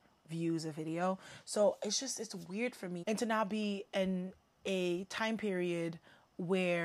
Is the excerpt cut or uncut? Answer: cut